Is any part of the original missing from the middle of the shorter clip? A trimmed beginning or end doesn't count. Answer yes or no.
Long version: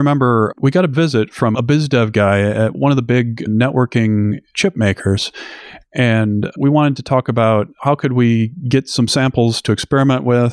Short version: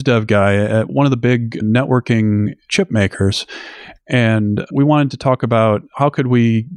no